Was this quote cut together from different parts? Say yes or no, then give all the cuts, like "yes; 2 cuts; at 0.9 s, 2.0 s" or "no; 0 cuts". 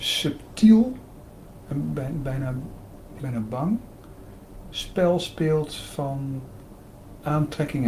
yes; 1 cut; at 3.2 s